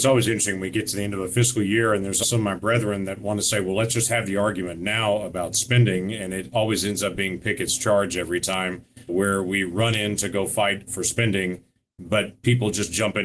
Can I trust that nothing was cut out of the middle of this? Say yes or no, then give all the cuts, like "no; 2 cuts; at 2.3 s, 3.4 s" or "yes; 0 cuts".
no; 2 cuts; at 2.2 s, 9.1 s